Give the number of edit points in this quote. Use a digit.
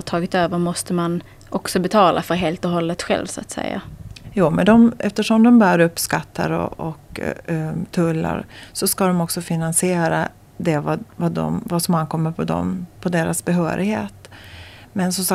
1